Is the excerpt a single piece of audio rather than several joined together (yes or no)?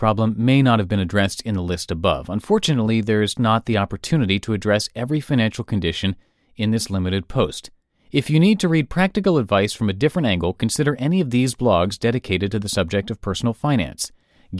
no